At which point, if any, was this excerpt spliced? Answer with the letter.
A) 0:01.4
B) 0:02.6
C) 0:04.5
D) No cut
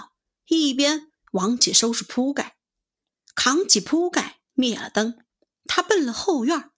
D